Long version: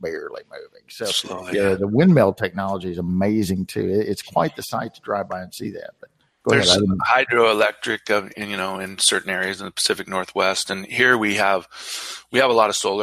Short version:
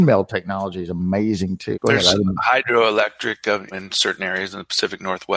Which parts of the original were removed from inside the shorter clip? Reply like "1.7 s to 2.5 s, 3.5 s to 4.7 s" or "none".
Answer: 3.8 s to 6.4 s, 8.3 s to 8.8 s